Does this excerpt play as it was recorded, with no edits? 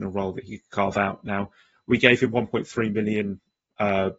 yes; 0 cuts

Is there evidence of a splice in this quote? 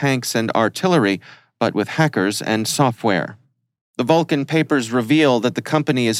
no; 0 cuts

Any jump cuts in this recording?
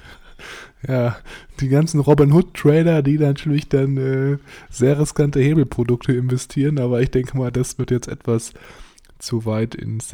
no; 0 cuts

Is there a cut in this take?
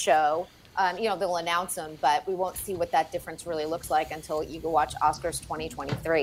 no; 0 cuts

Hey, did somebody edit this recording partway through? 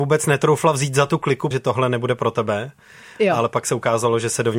yes; 1 cut; at 1.5 s

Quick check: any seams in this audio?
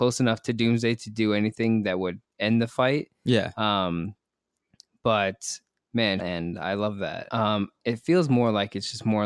yes; 2 cuts; at 6.2 s, 7.3 s

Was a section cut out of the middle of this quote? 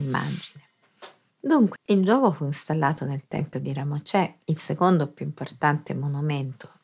yes; 2 cuts; at 1.8 s, 4.4 s

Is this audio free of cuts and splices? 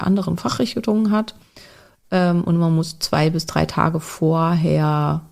yes; 0 cuts

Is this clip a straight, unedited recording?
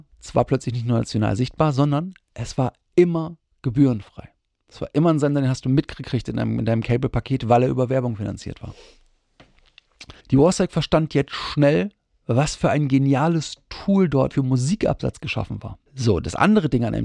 no; 3 cuts; at 10.2 s, 14.3 s, 15.9 s

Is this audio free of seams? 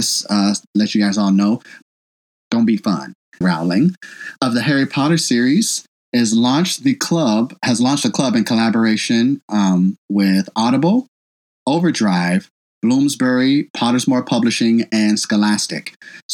no; 2 cuts; at 1.8 s, 3.4 s

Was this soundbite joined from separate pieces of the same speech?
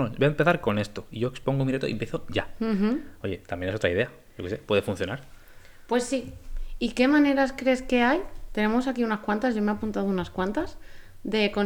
no; 0 cuts

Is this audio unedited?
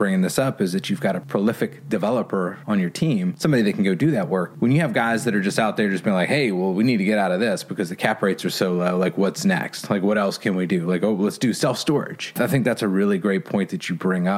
yes; 0 cuts

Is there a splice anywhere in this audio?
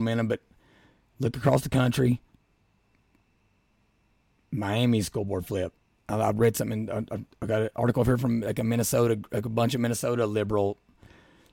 no; 0 cuts

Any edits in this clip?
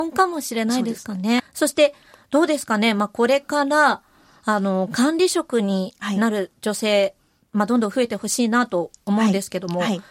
yes; 1 cut; at 1.4 s

